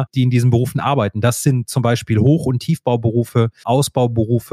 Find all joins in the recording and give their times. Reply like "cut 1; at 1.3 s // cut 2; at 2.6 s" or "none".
cut 1; at 3.6 s